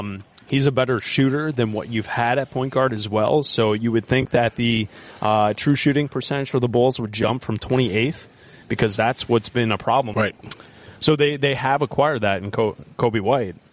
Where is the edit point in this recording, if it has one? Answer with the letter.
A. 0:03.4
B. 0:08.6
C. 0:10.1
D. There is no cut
C